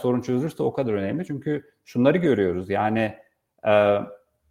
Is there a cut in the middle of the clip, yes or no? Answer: no